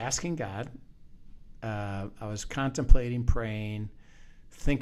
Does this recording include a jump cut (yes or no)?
no